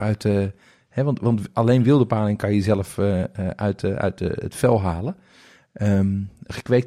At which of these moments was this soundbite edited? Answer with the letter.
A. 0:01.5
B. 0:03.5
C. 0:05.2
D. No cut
D